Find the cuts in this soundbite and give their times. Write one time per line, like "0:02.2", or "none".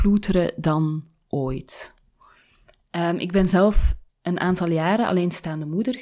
none